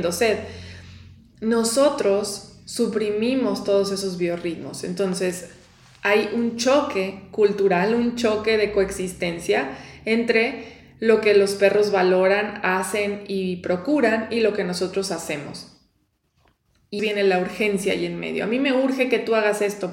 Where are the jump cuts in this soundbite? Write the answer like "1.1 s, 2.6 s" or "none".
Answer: 17.0 s